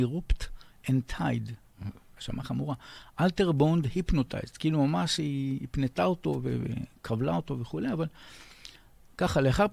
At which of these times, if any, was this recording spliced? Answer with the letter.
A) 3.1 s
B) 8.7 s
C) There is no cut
C